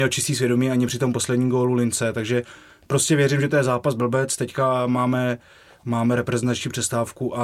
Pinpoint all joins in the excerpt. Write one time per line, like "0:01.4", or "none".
none